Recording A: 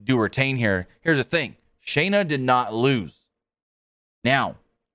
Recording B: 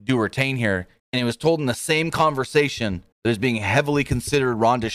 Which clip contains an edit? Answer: B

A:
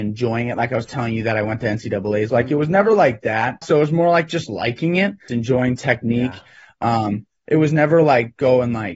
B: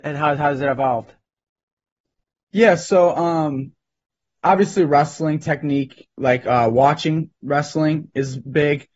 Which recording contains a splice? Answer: A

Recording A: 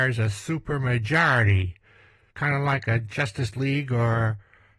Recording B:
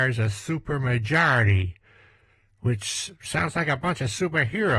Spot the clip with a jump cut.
A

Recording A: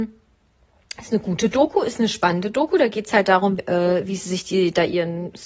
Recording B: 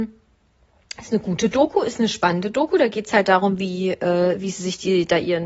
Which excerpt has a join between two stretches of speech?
A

